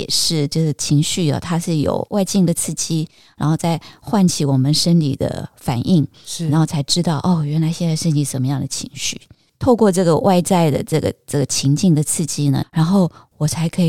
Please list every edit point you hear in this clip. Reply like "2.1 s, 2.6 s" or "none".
9.5 s, 12.6 s